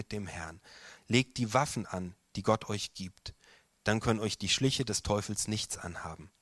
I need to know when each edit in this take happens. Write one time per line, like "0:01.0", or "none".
0:01.0